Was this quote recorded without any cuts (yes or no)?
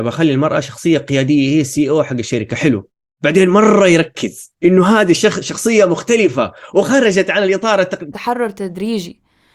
no